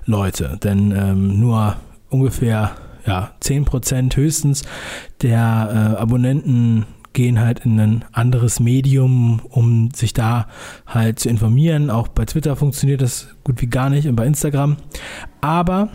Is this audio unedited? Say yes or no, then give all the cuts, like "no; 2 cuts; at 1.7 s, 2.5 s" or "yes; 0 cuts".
yes; 0 cuts